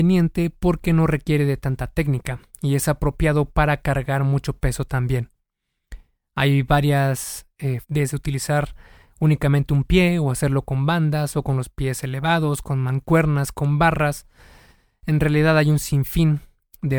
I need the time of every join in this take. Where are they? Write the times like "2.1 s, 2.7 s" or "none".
7.8 s

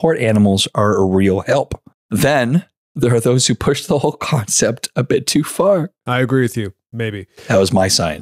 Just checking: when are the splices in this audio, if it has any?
6.0 s

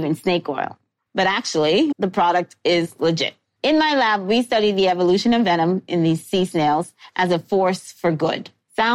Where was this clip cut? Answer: 1.9 s, 3.6 s

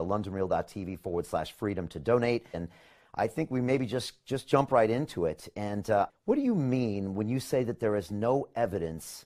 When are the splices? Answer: 2.5 s, 6.1 s

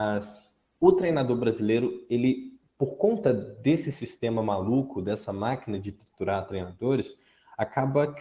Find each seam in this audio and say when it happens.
none

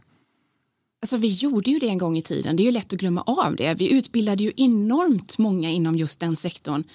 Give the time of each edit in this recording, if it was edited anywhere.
none

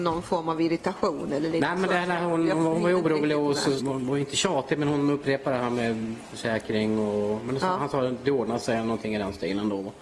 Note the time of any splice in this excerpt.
3.8 s

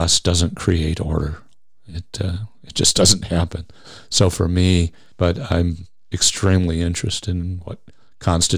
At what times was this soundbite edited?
5.1 s

